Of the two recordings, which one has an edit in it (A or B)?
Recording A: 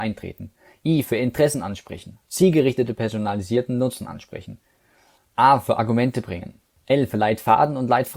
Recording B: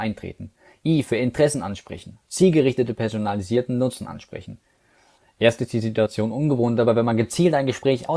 B